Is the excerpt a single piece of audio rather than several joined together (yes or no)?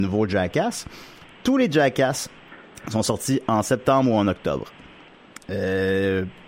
yes